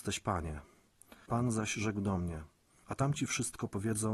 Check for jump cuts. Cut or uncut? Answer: cut